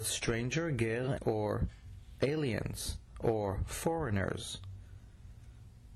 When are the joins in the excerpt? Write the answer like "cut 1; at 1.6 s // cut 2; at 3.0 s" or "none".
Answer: cut 1; at 1.1 s